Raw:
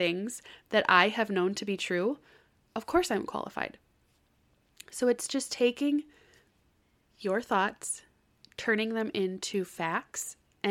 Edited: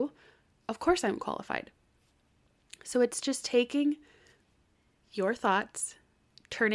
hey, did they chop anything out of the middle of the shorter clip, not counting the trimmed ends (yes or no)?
no